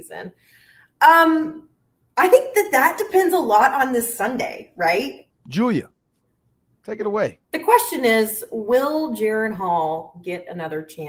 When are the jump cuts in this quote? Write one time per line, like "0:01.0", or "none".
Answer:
0:05.3
0:07.4